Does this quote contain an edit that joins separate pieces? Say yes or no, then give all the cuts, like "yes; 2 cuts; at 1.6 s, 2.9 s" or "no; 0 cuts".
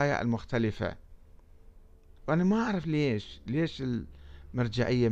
no; 0 cuts